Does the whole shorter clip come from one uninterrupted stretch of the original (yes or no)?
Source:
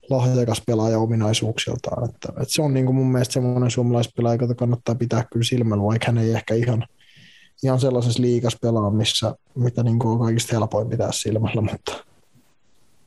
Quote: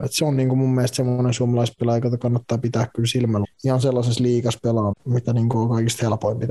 no